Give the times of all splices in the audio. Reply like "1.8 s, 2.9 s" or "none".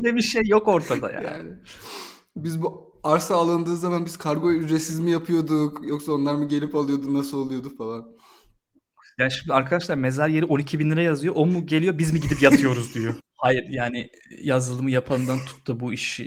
13.2 s